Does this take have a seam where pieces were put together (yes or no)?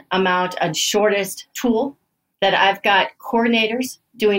no